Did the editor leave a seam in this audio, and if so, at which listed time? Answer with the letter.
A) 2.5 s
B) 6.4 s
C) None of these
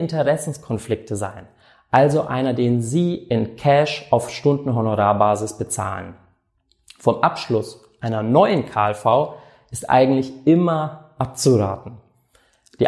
A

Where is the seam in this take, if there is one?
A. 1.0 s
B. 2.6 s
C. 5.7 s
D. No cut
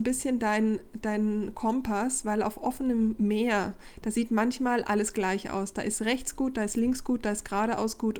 D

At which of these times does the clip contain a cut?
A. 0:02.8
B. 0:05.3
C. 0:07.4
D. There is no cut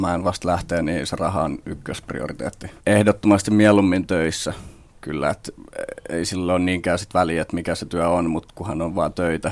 A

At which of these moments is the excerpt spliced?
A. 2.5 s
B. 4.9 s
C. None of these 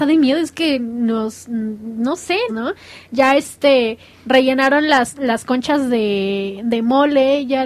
A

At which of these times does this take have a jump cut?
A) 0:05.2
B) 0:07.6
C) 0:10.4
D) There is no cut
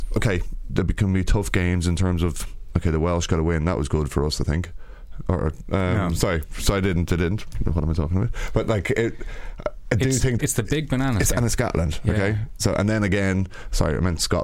C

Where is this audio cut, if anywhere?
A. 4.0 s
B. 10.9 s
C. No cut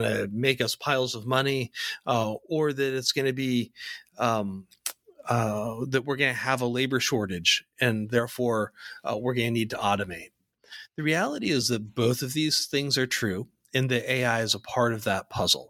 C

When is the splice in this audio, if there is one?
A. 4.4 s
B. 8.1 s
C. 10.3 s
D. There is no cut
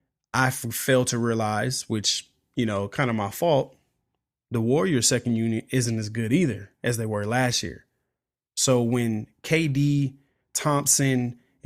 D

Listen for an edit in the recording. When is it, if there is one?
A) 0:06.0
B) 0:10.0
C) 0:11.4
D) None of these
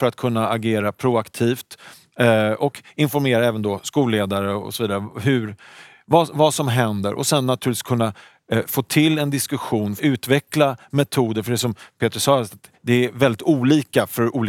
B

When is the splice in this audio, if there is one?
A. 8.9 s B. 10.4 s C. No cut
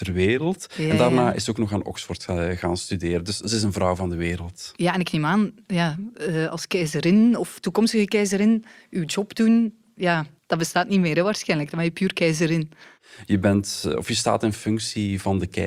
B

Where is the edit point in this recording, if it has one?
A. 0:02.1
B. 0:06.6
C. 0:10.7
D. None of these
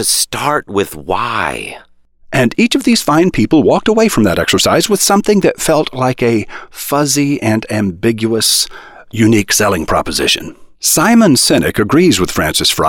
C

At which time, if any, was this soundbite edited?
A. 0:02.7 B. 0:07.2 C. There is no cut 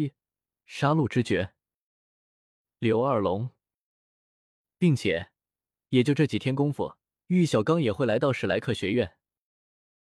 B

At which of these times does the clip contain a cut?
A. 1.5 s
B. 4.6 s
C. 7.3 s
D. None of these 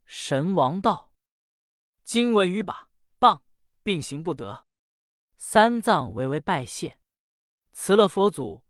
B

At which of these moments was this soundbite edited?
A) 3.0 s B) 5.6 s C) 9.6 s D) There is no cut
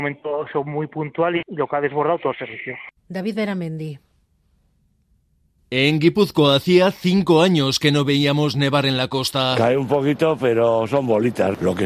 A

